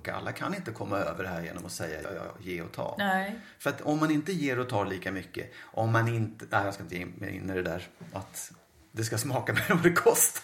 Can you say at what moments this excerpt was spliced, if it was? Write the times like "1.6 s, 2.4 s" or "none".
2.0 s